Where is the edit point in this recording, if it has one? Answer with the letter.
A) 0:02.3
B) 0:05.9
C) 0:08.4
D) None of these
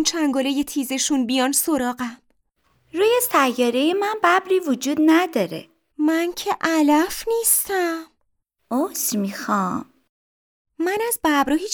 B